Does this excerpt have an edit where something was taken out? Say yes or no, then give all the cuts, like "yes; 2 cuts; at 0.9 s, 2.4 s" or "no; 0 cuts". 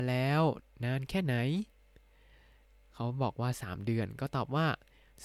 no; 0 cuts